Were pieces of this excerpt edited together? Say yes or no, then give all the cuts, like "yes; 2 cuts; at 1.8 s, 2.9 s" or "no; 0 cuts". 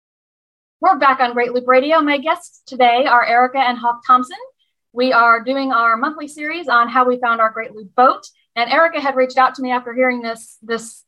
no; 0 cuts